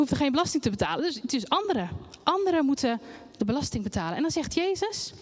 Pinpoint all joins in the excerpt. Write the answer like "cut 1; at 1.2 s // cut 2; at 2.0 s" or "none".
none